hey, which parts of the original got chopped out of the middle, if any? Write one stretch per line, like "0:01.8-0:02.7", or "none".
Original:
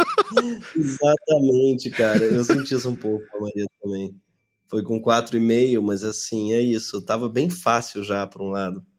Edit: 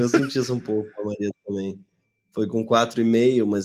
none